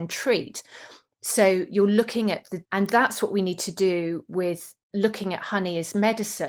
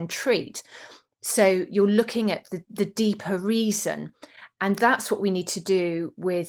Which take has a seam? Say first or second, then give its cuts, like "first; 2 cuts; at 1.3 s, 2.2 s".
first; 1 cut; at 2.6 s